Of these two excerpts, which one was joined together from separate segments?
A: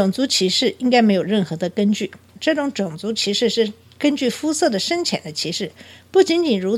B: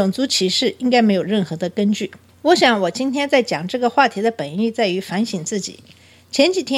A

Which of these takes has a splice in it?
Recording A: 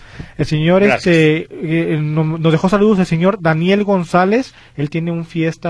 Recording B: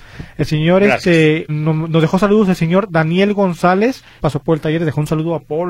B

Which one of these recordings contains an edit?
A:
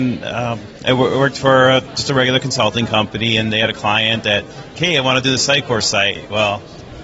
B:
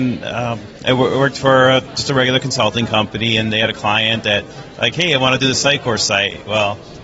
A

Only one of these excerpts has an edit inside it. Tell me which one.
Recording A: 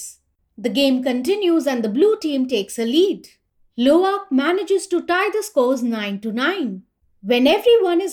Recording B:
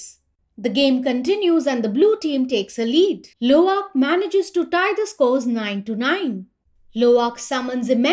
B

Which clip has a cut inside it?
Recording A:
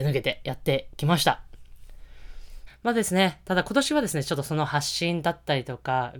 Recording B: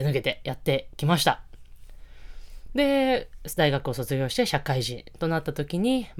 A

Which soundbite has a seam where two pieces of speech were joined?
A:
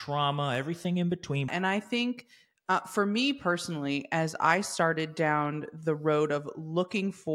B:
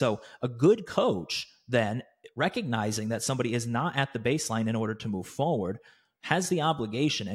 A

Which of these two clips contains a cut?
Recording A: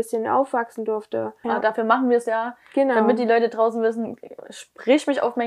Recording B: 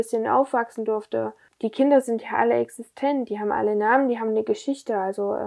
A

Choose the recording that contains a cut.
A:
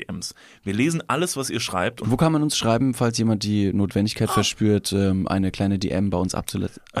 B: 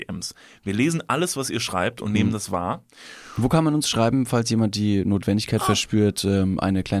A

